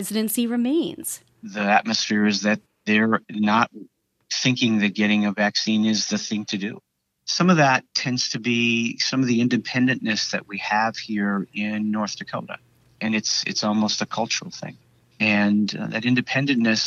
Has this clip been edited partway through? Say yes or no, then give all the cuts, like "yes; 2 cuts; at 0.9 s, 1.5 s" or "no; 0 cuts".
no; 0 cuts